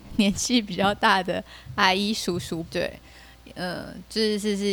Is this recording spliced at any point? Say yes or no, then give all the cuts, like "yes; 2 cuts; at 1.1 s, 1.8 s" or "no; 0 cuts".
yes; 1 cut; at 2.6 s